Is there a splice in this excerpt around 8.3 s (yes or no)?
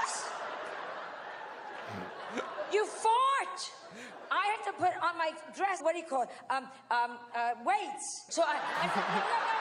yes